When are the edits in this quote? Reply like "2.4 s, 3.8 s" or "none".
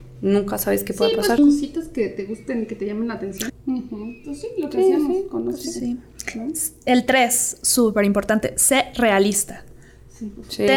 1.4 s, 3.5 s